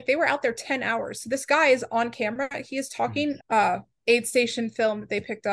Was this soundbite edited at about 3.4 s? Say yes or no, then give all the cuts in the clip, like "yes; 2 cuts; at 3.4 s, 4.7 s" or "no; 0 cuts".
yes; 1 cut; at 3.4 s